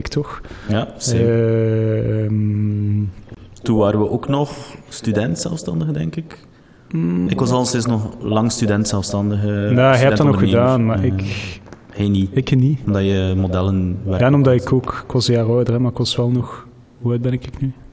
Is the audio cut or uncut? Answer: cut